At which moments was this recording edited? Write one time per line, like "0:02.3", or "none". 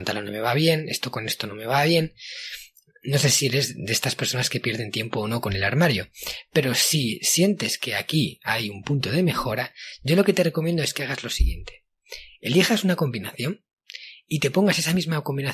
none

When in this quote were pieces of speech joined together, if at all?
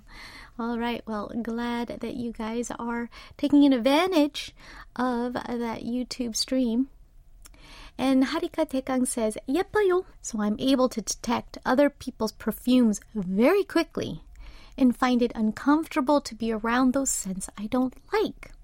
0:10.1

